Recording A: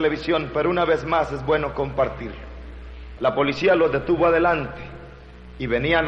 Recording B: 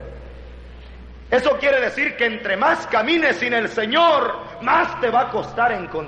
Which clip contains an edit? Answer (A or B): A